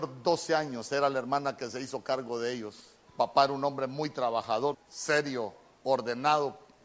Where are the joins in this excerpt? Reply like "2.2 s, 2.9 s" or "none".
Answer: 3.1 s, 4.7 s